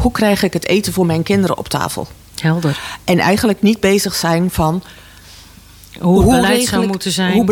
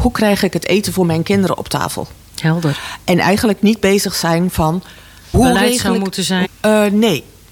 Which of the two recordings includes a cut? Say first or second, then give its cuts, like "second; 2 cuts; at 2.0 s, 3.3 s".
second; 2 cuts; at 5.3 s, 6.4 s